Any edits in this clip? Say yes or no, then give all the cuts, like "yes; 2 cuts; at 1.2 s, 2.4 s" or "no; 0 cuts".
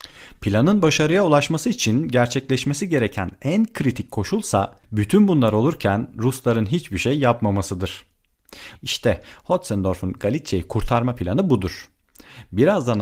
yes; 2 cuts; at 4.8 s, 8.8 s